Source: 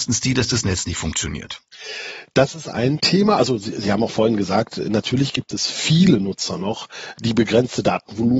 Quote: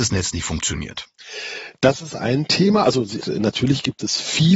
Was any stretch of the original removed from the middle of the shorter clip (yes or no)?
yes